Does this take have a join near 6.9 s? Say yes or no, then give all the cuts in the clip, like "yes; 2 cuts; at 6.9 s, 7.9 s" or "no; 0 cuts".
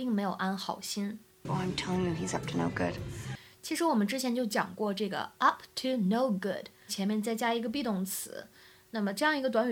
yes; 1 cut; at 6.9 s